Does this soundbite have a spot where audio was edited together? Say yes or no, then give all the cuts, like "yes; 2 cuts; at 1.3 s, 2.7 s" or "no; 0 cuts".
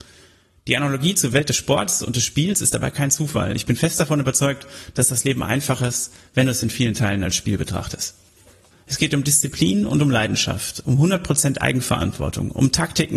yes; 1 cut; at 8.7 s